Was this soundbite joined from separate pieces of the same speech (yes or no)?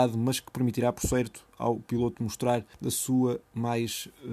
yes